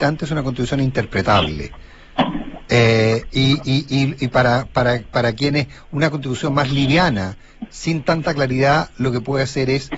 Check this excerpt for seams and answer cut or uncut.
uncut